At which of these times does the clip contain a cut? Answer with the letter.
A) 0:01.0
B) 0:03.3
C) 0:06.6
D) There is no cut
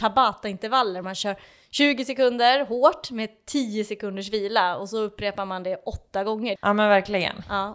C